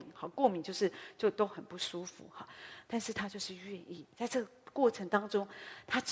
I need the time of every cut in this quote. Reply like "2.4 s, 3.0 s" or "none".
2.9 s